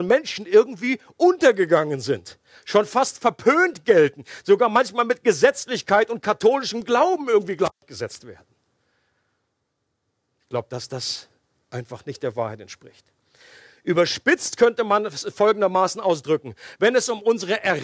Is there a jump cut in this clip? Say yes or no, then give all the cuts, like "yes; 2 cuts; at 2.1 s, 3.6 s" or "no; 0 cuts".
no; 0 cuts